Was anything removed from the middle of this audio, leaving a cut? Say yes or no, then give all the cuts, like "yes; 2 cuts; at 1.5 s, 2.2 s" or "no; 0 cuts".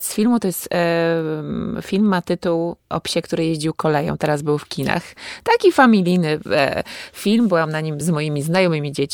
yes; 1 cut; at 8.0 s